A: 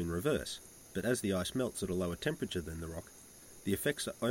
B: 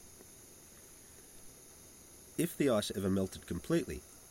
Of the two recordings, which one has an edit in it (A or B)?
B